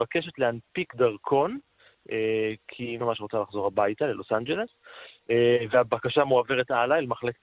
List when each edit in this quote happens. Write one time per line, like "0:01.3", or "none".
0:03.0